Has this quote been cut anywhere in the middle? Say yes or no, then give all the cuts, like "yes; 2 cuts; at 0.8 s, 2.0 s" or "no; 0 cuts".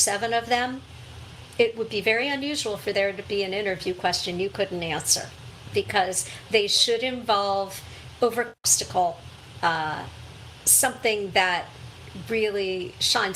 yes; 1 cut; at 8.6 s